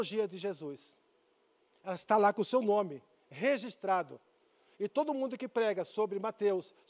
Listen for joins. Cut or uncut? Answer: uncut